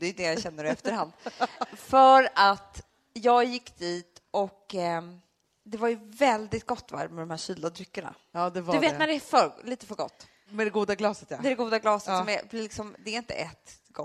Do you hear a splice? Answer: no; 0 cuts

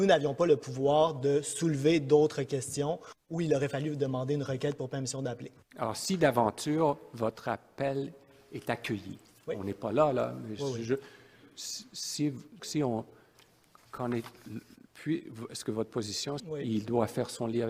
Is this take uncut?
no; 2 cuts; at 12.6 s, 16.4 s

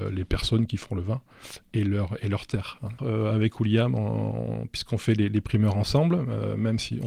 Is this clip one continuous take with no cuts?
no; 1 cut; at 3.0 s

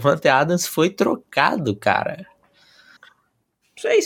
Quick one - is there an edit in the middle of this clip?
yes; 1 cut; at 3.0 s

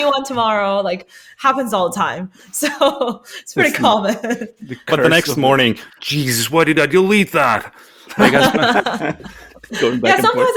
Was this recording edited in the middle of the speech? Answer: no; 0 cuts

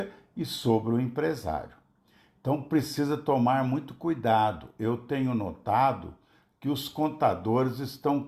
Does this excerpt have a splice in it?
no; 0 cuts

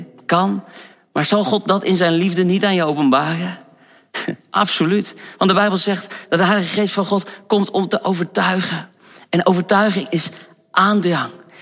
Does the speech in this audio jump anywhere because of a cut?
no; 0 cuts

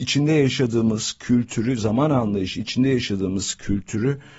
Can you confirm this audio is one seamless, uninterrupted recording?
yes; 0 cuts

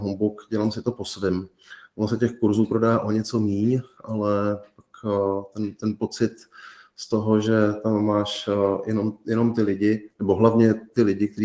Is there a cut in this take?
no; 0 cuts

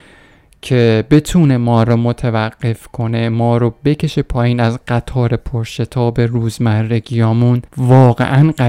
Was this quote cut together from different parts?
yes; 1 cut; at 7.7 s

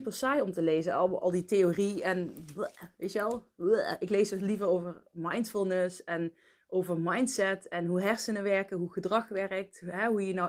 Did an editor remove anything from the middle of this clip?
no; 0 cuts

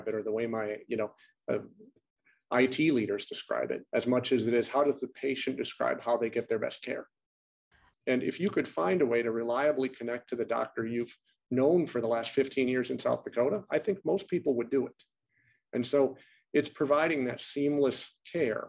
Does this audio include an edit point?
yes; 1 cut; at 7.9 s

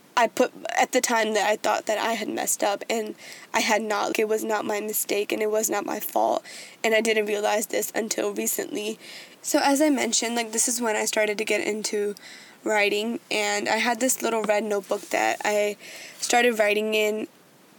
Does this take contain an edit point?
yes; 2 cuts; at 4.1 s, 9.4 s

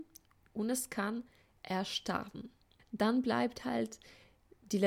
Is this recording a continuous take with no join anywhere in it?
no; 1 cut; at 2.8 s

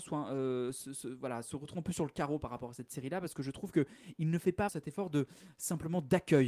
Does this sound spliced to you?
yes; 1 cut; at 4.7 s

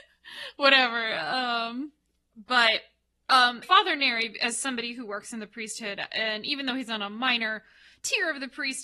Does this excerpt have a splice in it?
yes; 1 cut; at 3.6 s

